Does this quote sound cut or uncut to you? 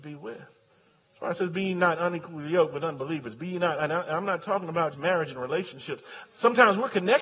cut